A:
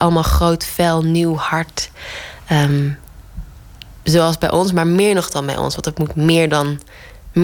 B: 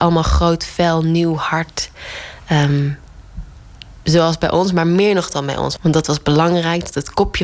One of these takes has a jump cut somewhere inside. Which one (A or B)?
B